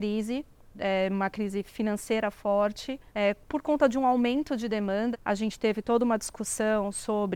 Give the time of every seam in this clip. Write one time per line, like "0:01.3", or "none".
0:03.1
0:05.1